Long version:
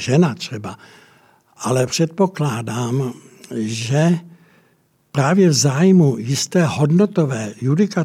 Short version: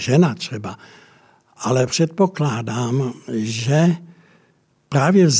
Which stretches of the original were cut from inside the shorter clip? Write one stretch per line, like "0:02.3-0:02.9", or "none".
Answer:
0:03.2-0:03.4